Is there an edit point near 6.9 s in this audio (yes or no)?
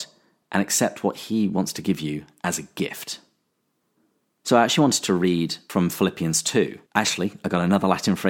yes